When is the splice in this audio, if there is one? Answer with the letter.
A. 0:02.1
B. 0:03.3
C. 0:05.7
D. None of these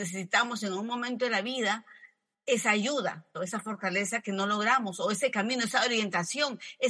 B